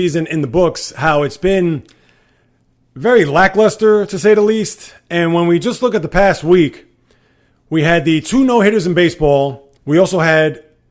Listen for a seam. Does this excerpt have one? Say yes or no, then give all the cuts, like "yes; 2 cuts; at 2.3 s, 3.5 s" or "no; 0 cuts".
yes; 1 cut; at 9.8 s